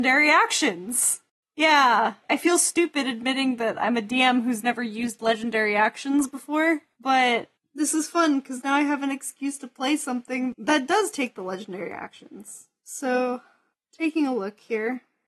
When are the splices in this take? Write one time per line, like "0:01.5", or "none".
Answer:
none